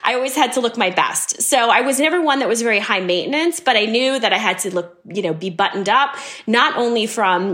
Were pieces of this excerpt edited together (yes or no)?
no